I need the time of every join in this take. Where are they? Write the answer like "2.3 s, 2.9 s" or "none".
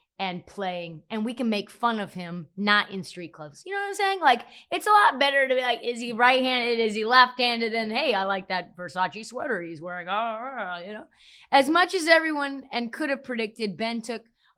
none